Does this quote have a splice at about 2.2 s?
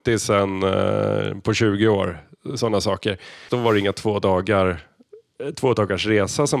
no; 1 cut; at 3.5 s

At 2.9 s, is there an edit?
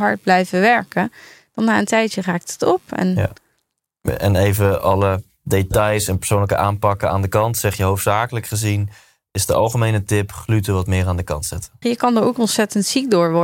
no; 1 cut; at 11.8 s

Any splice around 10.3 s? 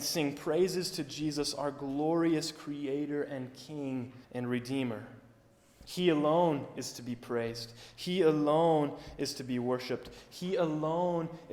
no; 1 cut; at 4.2 s

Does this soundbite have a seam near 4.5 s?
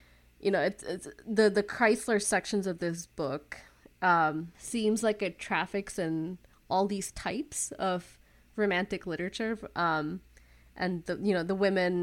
yes; 1 cut; at 4.5 s

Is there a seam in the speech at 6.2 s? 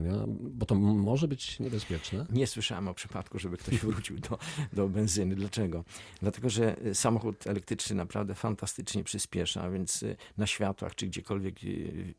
no; 1 cut; at 2.3 s

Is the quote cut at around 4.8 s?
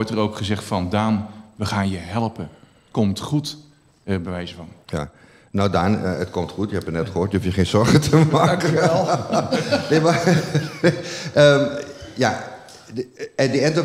no; 0 cuts

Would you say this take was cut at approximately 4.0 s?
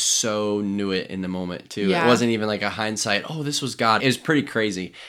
yes; 1 cut; at 4.0 s

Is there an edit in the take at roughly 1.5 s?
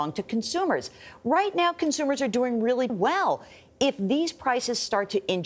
no; 1 cut; at 2.9 s

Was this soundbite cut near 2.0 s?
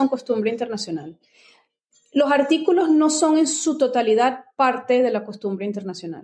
no; 0 cuts

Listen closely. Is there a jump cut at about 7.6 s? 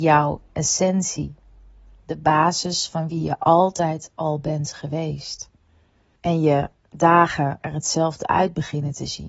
yes; 2 cuts; at 6.1 s, 7.6 s

